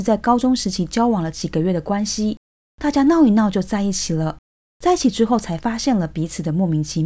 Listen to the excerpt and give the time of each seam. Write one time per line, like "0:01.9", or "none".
none